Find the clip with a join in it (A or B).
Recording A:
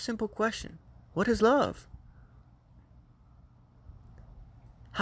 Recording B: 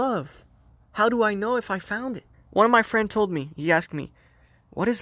B